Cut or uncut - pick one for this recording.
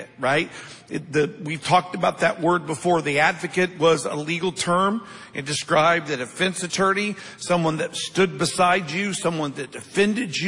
uncut